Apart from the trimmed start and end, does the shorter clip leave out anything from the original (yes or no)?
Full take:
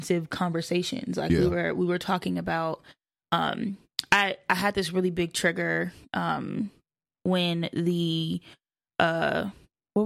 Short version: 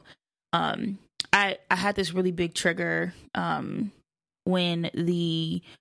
no